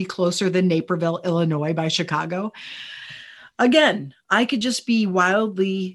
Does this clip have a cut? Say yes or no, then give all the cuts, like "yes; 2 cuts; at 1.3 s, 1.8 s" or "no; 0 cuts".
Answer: no; 0 cuts